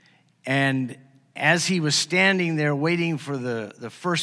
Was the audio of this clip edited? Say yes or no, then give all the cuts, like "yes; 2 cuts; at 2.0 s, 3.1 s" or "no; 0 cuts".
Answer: no; 0 cuts